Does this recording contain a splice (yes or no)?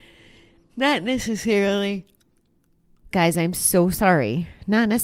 yes